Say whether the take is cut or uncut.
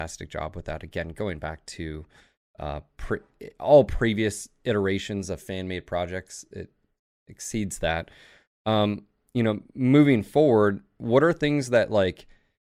uncut